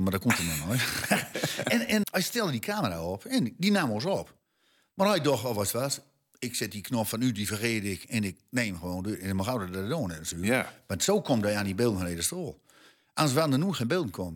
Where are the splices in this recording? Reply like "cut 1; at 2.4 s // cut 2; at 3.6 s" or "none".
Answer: cut 1; at 2.0 s